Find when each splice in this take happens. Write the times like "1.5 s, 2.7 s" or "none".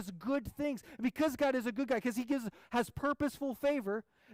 none